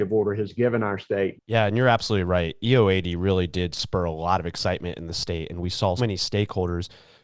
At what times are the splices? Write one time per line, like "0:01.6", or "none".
0:01.4
0:06.0